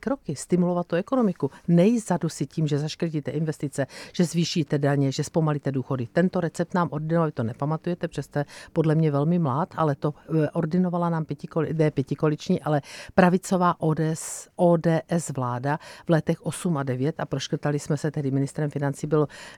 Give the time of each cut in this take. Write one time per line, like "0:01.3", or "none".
none